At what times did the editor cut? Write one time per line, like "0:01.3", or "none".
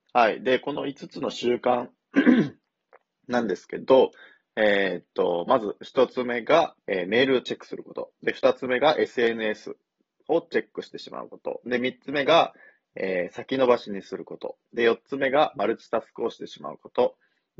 0:06.8